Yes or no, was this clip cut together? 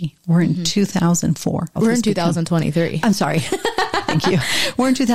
yes